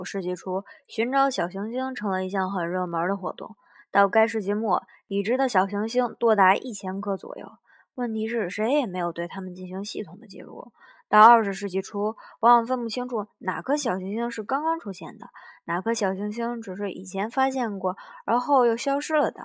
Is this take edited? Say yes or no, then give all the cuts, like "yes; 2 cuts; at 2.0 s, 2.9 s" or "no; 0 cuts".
no; 0 cuts